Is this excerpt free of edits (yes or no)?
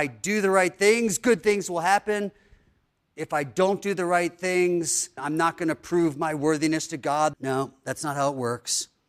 no